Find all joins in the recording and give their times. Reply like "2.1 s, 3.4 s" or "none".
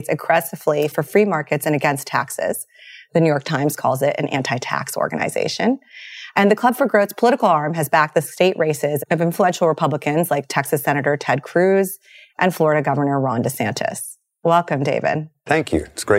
none